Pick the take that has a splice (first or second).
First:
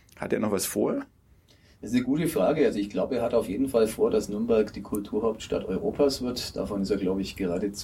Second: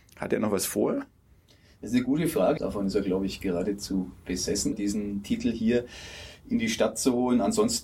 second